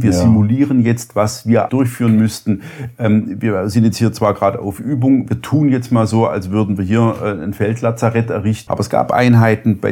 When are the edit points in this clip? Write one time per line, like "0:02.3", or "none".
0:01.7
0:08.7